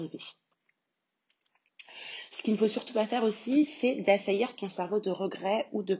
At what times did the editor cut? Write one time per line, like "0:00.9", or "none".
none